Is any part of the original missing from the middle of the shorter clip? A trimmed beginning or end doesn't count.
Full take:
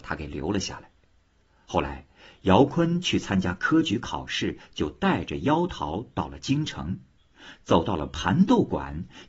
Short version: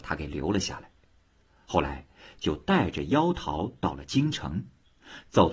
yes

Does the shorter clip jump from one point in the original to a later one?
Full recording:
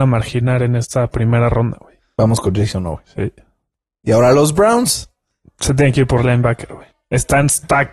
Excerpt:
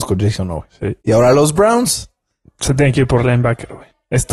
yes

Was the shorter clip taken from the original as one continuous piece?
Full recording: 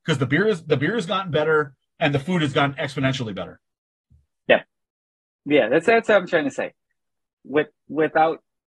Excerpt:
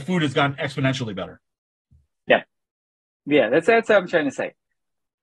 yes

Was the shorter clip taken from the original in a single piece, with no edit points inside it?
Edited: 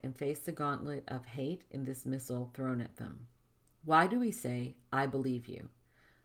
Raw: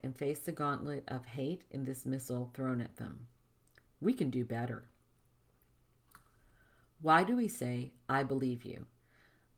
no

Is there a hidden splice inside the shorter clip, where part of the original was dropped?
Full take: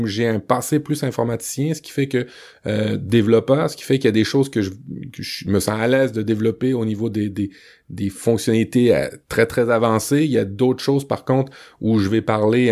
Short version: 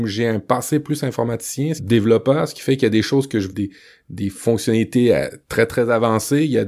yes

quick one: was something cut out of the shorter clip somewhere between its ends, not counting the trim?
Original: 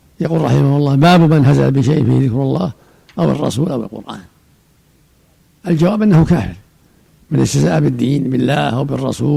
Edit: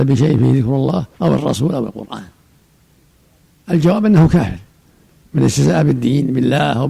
yes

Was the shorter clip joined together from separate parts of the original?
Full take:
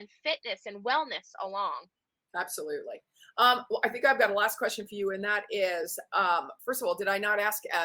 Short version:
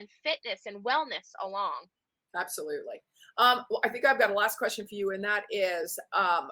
no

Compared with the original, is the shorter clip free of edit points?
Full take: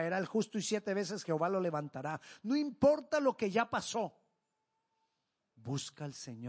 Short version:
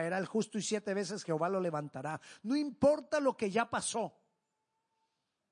yes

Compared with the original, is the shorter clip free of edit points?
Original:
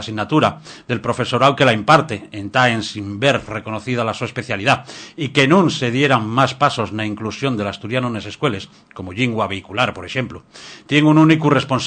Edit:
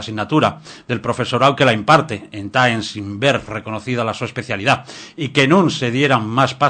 yes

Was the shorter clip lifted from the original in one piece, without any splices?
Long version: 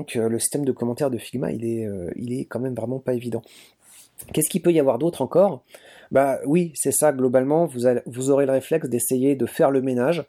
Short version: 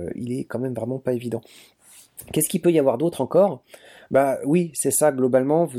yes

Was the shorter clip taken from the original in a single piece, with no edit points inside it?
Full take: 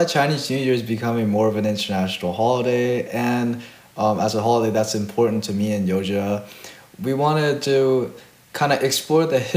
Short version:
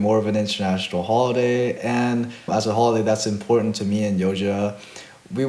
no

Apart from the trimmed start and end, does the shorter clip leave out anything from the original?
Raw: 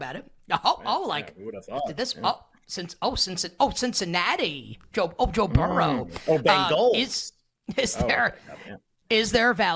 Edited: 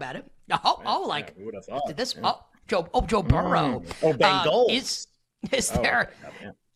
yes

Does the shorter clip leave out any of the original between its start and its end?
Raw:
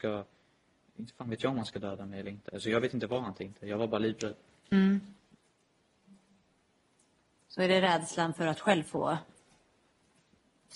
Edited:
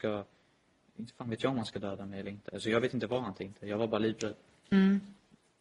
no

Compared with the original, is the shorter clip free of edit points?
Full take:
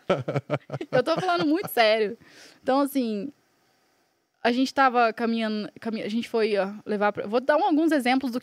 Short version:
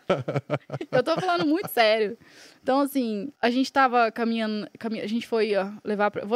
no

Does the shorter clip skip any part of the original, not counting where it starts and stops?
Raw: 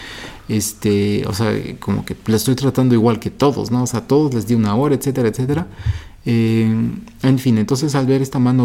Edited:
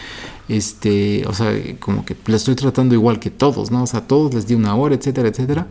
no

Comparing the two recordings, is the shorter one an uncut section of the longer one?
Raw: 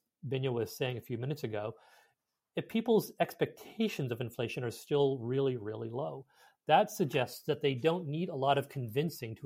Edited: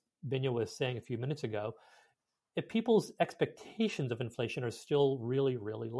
yes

